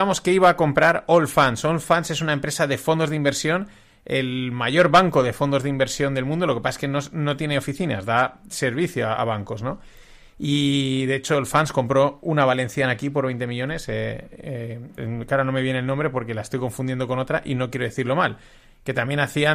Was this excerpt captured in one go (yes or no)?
no